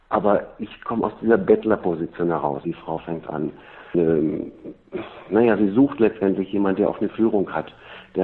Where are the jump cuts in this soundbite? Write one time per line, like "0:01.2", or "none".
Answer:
0:02.6
0:03.9